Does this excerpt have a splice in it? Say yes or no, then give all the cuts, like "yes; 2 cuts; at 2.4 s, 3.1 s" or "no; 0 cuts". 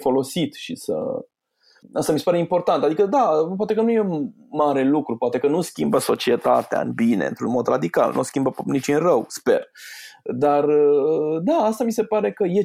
no; 0 cuts